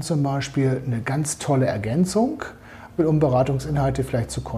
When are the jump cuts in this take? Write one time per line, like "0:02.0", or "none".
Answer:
0:03.0